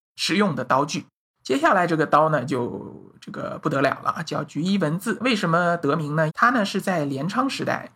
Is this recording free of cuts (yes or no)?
no